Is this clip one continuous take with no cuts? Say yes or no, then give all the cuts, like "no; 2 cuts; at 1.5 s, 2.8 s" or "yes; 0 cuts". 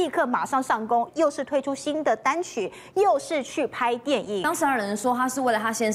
no; 1 cut; at 1.1 s